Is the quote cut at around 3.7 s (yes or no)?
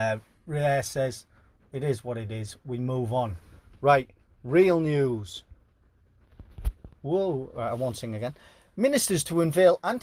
no